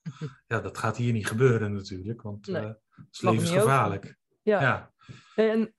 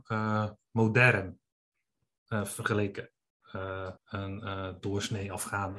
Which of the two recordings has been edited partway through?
second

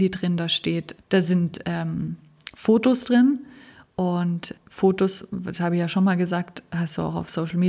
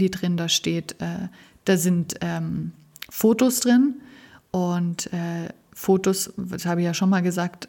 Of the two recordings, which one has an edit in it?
first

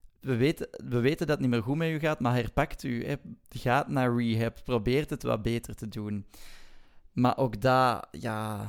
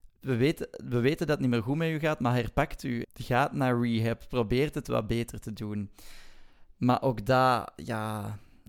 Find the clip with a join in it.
second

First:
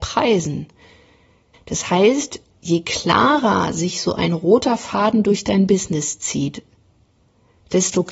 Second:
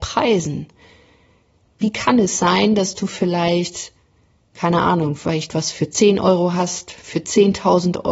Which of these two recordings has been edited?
first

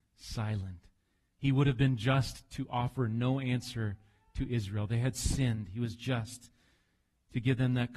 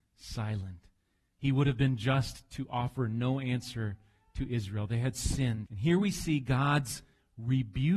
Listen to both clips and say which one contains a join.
second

